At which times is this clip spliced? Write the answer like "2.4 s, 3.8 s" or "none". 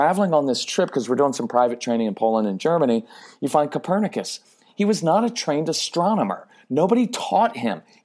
4.7 s